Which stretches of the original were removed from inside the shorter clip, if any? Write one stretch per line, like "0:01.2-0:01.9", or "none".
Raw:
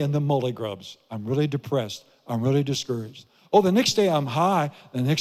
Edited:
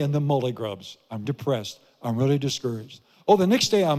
0:01.2-0:01.5